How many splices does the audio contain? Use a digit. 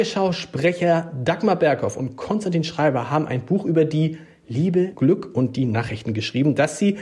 1